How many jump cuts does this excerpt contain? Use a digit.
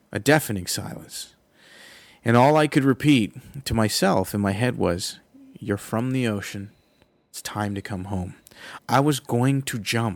1